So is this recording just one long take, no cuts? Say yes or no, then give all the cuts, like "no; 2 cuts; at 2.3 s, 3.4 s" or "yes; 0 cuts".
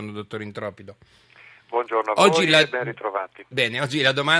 yes; 0 cuts